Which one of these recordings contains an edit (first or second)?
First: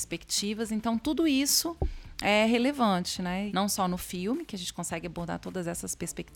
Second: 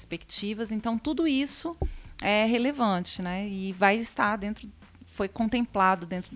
first